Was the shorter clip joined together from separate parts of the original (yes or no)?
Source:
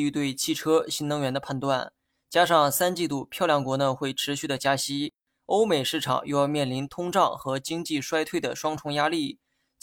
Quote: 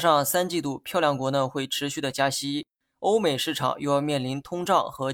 no